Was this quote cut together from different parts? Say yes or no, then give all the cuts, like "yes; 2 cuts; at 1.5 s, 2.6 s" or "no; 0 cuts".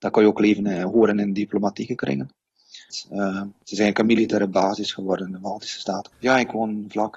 yes; 2 cuts; at 2.9 s, 6.1 s